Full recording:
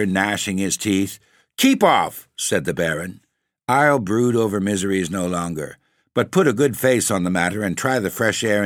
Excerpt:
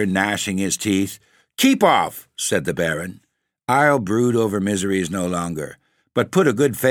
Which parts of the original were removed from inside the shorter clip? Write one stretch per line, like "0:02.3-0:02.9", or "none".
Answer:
none